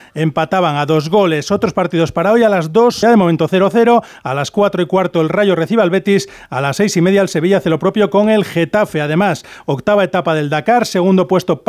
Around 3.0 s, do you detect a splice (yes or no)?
yes